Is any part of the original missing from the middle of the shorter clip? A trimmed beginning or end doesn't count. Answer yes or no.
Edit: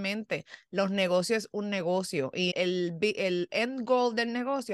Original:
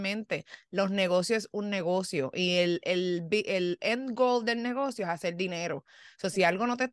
yes